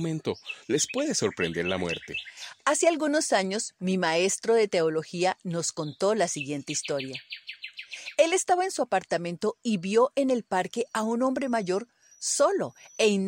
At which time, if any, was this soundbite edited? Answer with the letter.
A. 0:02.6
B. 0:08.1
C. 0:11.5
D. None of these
D